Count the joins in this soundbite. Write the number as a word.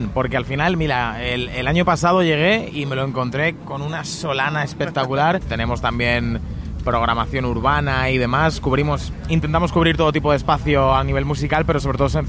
two